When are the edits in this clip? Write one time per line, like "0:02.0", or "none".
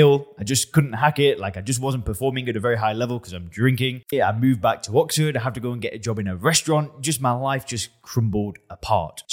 0:04.1